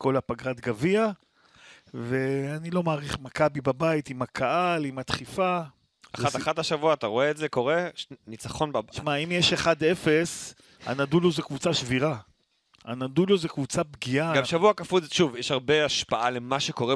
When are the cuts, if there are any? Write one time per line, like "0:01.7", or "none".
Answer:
none